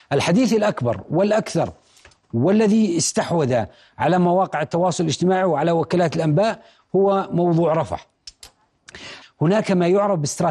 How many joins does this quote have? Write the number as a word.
one